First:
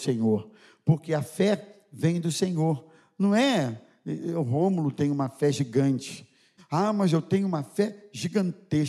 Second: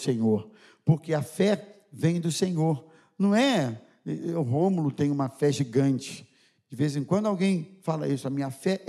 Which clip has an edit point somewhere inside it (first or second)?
first